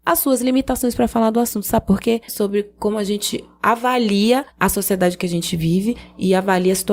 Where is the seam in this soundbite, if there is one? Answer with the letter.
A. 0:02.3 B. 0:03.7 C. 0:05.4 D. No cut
A